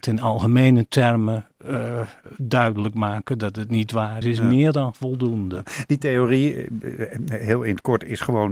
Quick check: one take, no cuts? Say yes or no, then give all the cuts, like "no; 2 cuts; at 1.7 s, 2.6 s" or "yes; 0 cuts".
no; 1 cut; at 4.2 s